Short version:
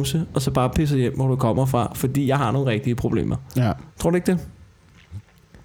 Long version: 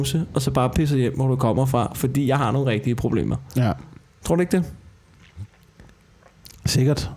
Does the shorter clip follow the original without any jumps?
no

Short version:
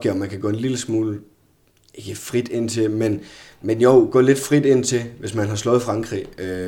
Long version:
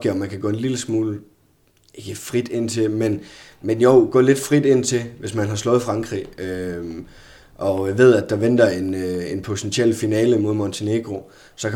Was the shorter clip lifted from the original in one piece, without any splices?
yes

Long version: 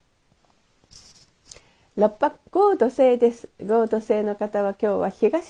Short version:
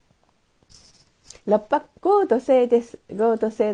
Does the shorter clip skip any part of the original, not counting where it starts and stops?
yes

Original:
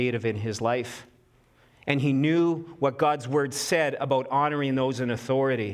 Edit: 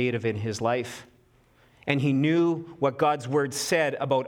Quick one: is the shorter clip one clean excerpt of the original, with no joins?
yes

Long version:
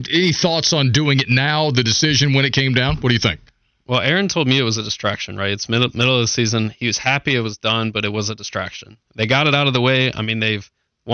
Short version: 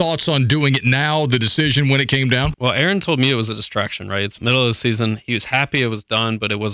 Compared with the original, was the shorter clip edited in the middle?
yes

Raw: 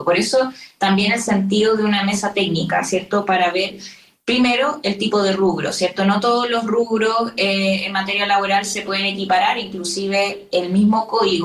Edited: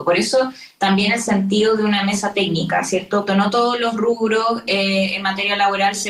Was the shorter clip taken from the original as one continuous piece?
no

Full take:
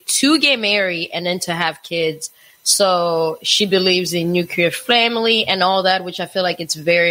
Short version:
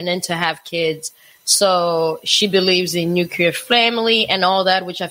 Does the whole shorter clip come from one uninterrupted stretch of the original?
yes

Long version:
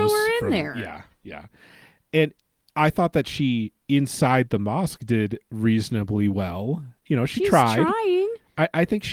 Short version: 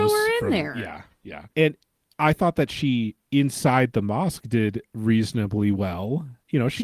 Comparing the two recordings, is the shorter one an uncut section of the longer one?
no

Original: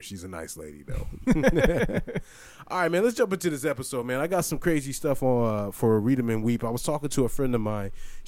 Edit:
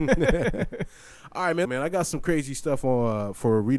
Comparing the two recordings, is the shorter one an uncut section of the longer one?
no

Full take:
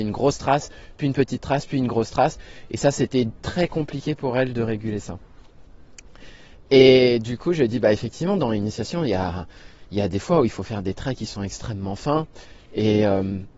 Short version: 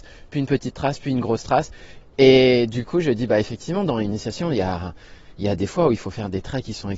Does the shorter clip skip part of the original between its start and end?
yes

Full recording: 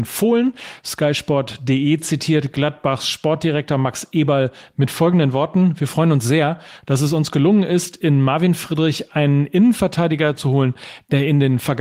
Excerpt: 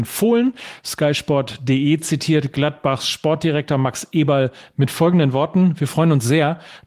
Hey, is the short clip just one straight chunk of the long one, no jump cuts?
yes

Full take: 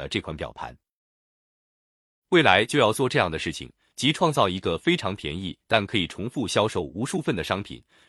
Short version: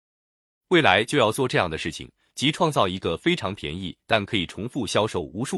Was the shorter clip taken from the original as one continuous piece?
yes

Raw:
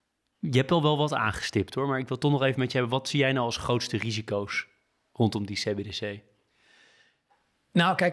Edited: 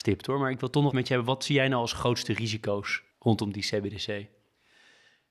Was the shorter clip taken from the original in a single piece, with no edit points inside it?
no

